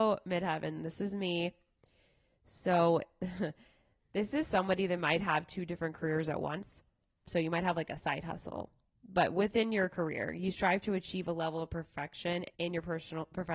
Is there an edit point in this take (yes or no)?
yes